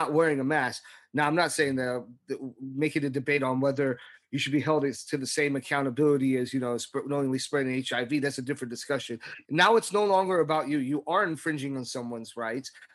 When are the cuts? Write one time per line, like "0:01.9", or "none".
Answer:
0:09.4